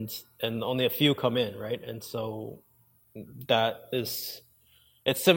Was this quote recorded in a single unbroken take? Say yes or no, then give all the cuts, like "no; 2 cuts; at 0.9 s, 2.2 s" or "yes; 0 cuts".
yes; 0 cuts